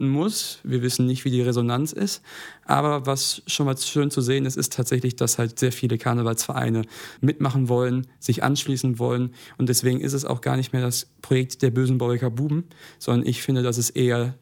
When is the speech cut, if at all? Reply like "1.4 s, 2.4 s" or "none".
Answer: 7.2 s

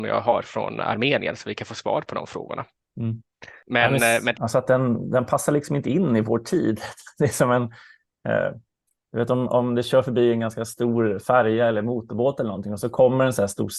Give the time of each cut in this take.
4.3 s

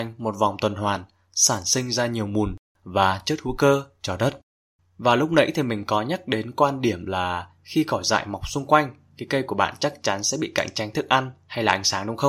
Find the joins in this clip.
4.8 s

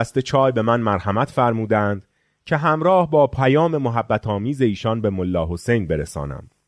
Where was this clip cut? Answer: none

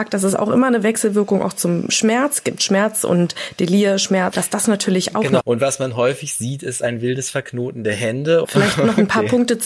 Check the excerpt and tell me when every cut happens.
4.3 s, 5.4 s, 8.4 s

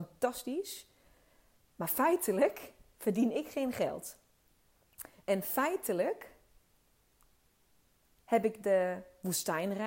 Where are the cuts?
none

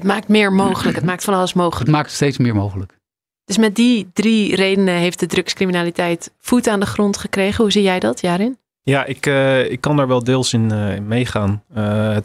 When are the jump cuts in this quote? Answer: none

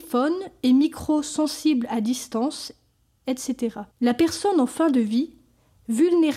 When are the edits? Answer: 3.9 s

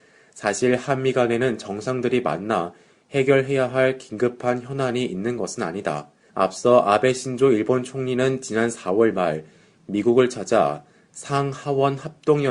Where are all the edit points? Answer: 6.3 s

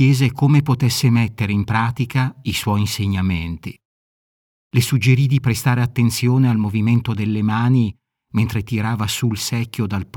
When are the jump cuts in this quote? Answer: 4.6 s

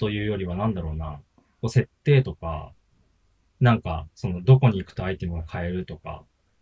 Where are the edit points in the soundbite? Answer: none

